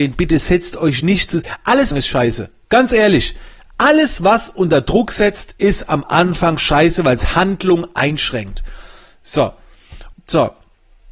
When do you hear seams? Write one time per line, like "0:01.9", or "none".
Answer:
0:01.9
0:10.1